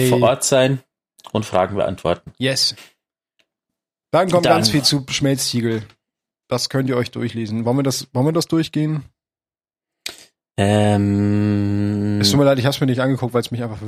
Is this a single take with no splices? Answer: yes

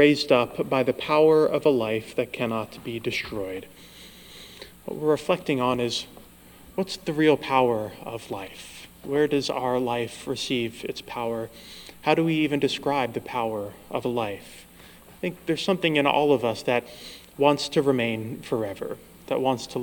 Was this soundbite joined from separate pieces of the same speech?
no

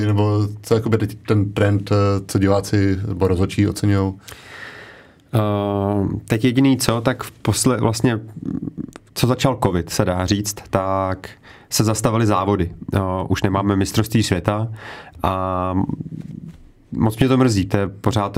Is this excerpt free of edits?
yes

